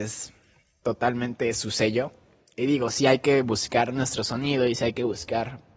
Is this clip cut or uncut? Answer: uncut